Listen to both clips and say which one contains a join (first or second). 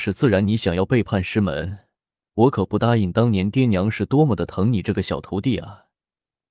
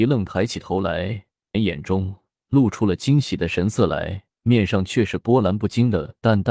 second